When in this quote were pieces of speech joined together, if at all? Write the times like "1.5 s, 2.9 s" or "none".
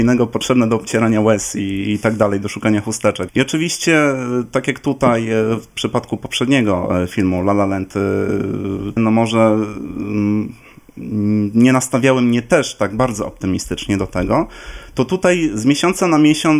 3.3 s, 9.0 s